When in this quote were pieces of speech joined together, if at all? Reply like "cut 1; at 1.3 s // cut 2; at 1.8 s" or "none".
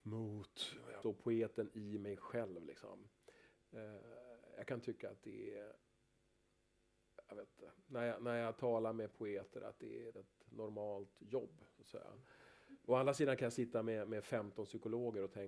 cut 1; at 1.0 s // cut 2; at 10.1 s